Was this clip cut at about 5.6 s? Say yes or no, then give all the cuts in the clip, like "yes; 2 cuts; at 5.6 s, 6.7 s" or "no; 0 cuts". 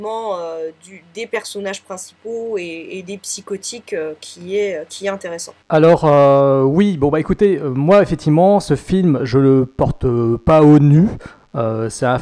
yes; 1 cut; at 5.6 s